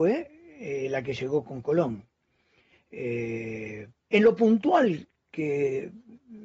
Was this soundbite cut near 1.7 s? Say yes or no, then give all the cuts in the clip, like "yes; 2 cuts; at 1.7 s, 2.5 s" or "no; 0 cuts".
no; 1 cut; at 3.9 s